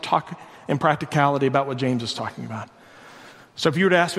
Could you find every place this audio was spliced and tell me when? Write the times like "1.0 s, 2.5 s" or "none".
none